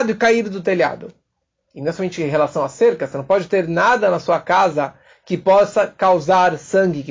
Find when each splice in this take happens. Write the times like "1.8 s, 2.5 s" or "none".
1.6 s